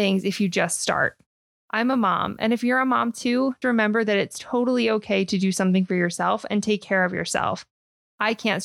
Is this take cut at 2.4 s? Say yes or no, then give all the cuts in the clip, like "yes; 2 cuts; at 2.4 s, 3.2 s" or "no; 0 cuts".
no; 1 cut; at 3.6 s